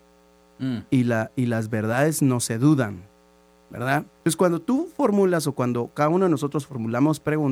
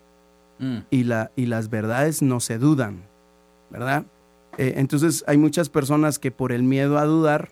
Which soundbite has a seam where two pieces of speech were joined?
first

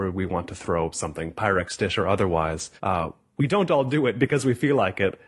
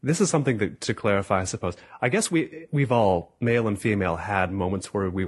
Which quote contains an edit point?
first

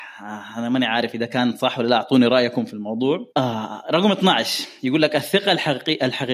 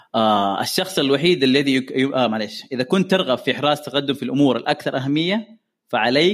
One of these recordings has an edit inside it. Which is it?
first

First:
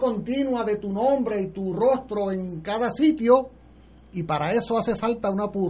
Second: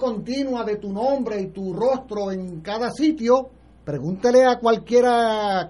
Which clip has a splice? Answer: second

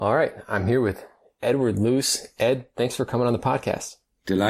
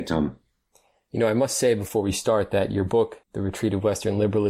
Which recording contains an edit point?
second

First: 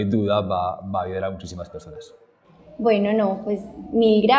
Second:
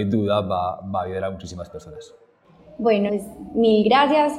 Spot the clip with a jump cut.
second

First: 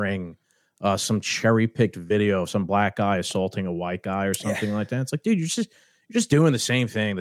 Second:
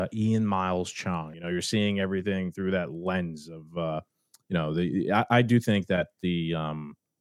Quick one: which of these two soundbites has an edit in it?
second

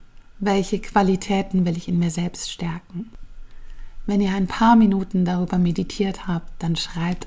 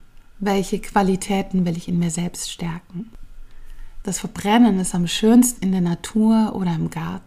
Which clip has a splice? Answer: second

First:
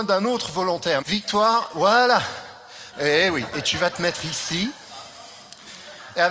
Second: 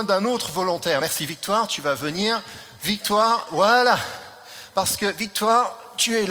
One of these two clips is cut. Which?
first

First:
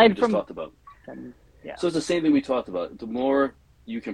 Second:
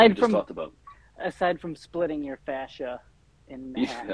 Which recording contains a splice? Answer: first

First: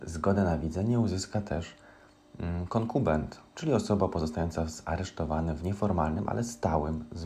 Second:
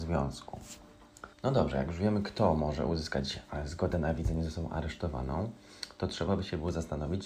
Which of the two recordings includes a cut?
second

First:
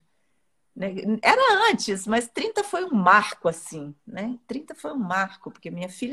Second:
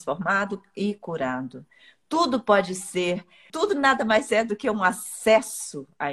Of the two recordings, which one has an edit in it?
second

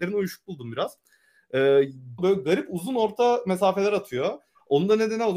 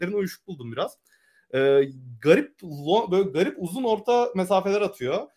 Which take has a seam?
first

